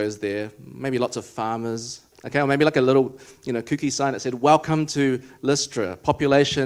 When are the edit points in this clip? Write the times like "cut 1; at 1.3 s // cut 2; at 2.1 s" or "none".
cut 1; at 2.1 s